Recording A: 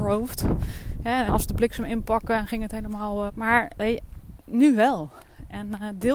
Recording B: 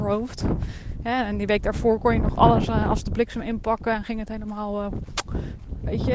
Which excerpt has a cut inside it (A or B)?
A